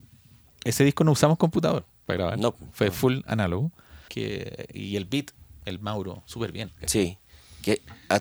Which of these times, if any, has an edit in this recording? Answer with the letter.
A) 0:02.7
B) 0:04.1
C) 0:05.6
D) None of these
B